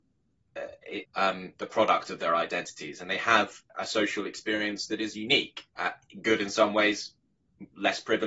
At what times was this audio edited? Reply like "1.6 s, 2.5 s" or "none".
1.0 s, 5.7 s